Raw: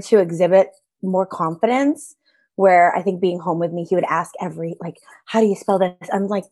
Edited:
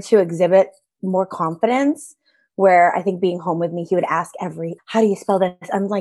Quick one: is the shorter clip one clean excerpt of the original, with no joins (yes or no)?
no